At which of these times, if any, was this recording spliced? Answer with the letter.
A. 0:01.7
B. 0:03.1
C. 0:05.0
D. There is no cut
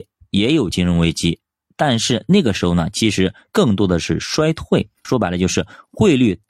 C